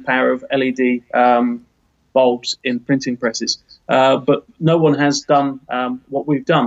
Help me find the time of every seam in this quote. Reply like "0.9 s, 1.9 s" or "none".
none